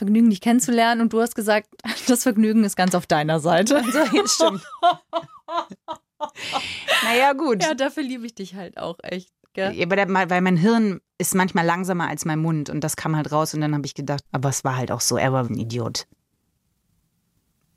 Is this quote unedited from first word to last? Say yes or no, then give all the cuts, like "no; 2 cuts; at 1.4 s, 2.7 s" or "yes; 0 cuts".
no; 2 cuts; at 14.3 s, 15.5 s